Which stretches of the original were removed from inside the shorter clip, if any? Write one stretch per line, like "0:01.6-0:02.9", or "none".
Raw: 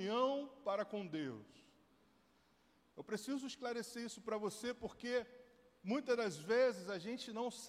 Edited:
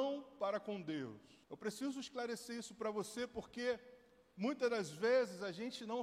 0:01.7-0:02.9